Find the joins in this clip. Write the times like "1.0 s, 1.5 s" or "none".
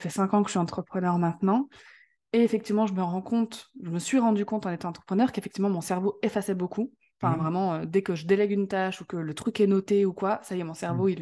none